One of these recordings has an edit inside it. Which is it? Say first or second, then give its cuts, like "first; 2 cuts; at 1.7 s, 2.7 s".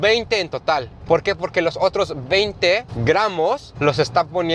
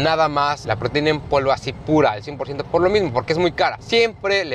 first; 1 cut; at 1.1 s